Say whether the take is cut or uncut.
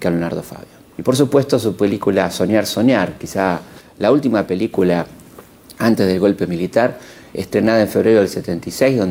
cut